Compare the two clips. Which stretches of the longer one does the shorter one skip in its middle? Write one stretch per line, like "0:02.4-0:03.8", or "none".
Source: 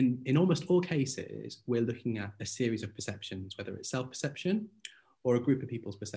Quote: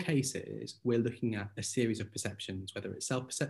none